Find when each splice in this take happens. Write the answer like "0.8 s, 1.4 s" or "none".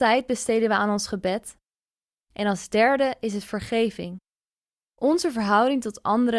2.3 s